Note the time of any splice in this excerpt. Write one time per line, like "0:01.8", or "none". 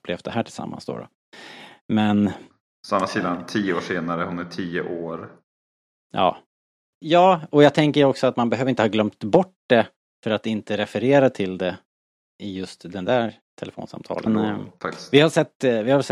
0:06.9
0:14.3